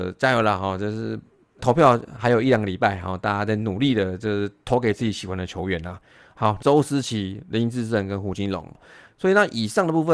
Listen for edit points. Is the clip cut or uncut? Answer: cut